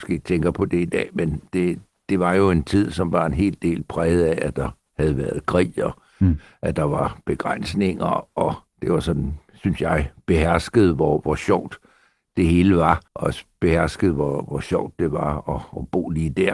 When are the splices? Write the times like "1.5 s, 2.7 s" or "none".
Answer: 13.1 s